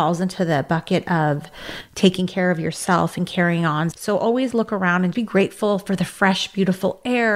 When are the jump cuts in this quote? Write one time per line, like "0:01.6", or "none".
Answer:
0:03.9
0:05.1